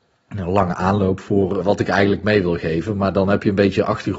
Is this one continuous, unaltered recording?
no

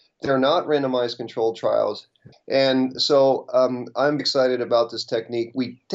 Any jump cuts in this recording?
yes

